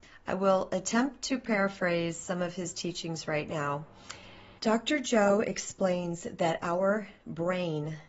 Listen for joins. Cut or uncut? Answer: cut